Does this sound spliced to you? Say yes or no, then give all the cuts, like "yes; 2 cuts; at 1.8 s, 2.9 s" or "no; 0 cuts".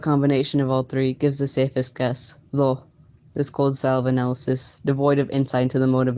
no; 0 cuts